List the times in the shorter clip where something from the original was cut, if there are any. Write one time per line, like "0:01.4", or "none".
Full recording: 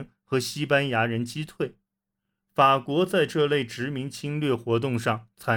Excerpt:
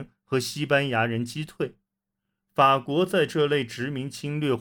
none